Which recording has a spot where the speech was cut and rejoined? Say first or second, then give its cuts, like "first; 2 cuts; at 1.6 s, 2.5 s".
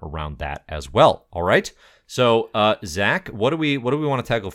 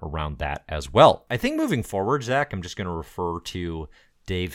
second; 1 cut; at 1.3 s